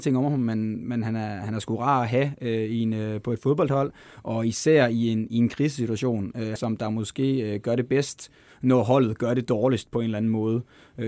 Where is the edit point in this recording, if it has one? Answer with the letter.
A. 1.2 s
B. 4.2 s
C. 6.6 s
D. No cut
C